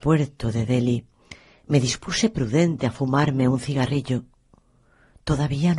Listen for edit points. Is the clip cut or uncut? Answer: uncut